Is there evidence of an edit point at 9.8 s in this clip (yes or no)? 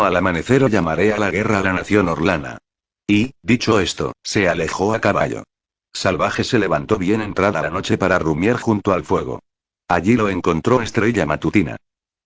no